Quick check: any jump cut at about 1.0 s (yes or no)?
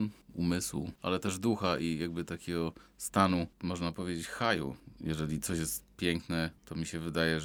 no